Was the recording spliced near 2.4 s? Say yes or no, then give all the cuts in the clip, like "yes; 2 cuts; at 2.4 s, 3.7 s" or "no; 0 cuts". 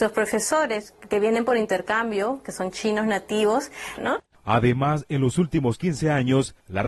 no; 1 cut; at 4.0 s